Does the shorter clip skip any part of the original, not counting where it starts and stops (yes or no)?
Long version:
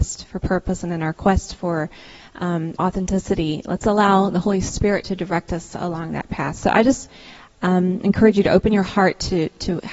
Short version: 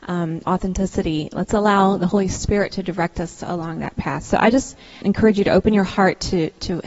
yes